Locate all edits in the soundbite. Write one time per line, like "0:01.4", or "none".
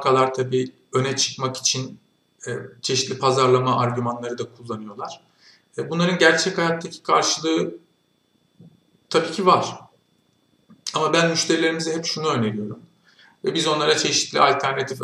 0:13.2